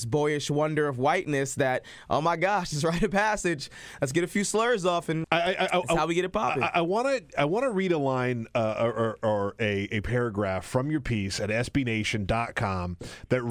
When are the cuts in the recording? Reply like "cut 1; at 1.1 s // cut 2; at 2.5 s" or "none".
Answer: cut 1; at 5.2 s